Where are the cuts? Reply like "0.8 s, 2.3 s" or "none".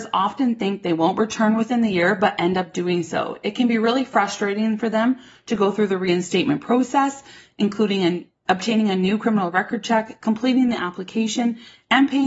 none